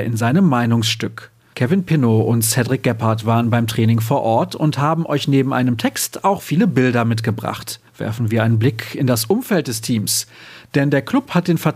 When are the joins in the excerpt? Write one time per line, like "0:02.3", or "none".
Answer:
0:01.5
0:07.9